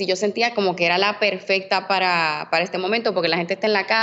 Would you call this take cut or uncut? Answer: uncut